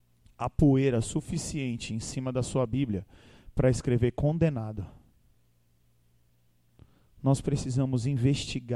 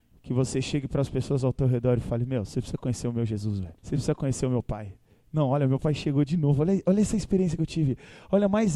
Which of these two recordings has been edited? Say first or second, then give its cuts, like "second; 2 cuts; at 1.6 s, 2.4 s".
second; 1 cut; at 3.8 s